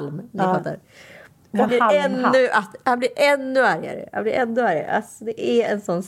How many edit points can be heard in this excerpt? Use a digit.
1